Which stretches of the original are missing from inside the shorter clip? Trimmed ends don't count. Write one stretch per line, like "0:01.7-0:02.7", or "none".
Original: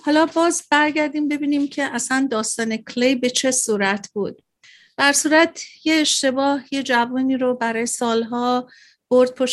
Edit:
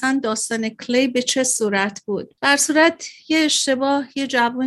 0:04.5-0:04.9